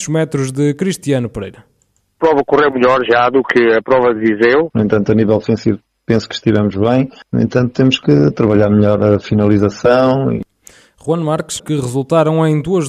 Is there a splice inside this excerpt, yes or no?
yes